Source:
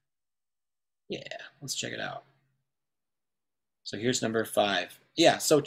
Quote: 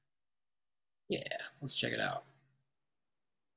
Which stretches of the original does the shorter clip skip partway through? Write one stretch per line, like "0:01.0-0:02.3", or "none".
none